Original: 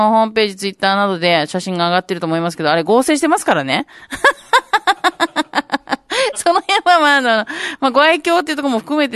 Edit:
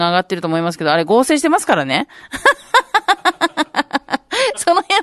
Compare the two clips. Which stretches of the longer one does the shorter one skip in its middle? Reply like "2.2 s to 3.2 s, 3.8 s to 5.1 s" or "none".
none